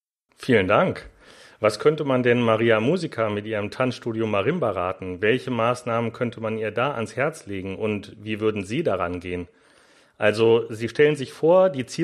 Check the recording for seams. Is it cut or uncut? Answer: uncut